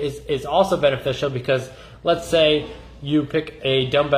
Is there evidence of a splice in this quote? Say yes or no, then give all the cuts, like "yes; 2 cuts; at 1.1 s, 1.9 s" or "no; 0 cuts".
no; 0 cuts